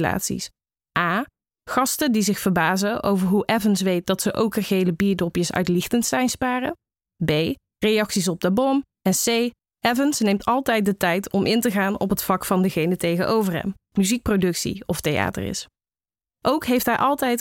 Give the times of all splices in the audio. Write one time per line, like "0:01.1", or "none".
0:09.6
0:13.9